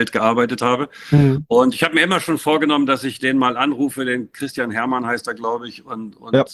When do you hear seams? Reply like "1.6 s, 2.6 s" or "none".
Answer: none